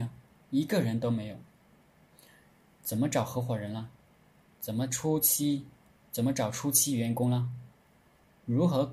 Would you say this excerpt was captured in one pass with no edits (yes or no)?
yes